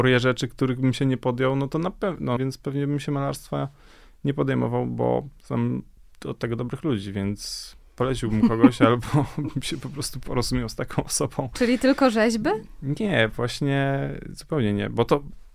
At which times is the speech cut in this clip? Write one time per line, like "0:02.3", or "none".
0:02.4